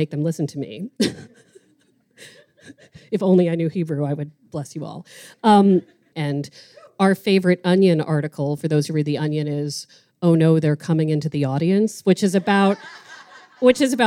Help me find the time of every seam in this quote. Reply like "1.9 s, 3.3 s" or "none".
6.1 s